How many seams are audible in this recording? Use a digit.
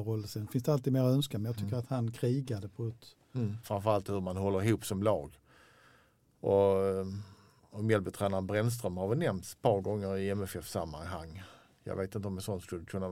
1